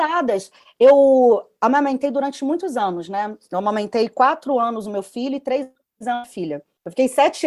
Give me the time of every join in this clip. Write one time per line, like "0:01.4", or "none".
none